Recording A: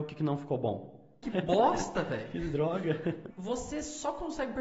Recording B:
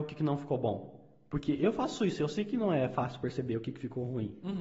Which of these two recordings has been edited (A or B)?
A